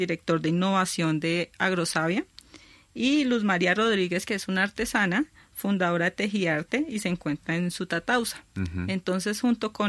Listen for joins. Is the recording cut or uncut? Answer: uncut